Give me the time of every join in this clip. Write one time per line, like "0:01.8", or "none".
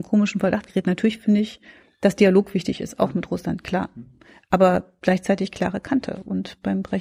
none